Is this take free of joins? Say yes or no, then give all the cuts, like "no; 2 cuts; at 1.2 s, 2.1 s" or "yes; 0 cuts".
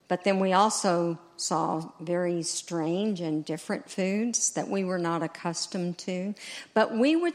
yes; 0 cuts